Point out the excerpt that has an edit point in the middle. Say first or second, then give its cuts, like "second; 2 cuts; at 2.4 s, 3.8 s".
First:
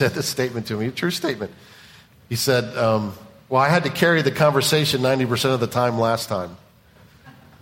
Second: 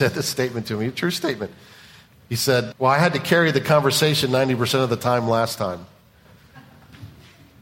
second; 1 cut; at 2.7 s